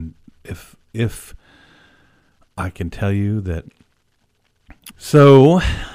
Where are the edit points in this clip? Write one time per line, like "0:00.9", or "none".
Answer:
0:04.9

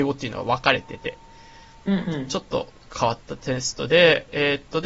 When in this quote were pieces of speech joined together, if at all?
none

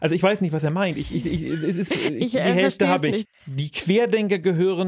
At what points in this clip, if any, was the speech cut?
0:03.3

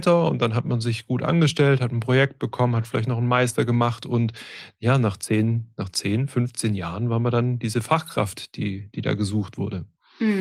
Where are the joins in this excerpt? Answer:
none

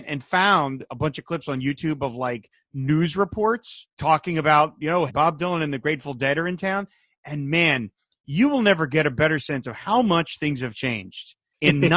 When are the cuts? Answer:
0:03.9
0:05.1

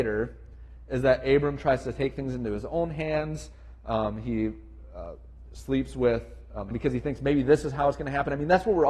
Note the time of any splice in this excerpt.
0:06.7

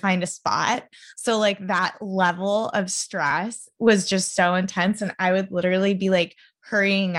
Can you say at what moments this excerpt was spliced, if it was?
none

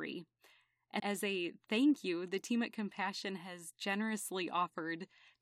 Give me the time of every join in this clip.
0:01.0

